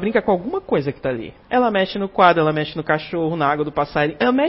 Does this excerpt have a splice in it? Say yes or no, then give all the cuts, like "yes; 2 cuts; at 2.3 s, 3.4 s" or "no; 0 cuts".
yes; 1 cut; at 1.4 s